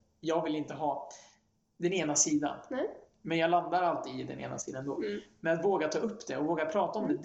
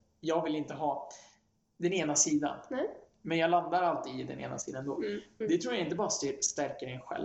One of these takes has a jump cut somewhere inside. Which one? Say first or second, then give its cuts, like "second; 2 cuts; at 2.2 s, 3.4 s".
second; 1 cut; at 5.4 s